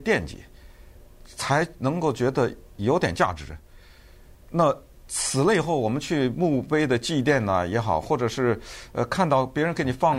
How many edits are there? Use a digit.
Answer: 0